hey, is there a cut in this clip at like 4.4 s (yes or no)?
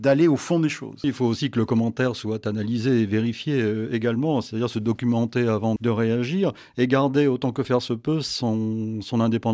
no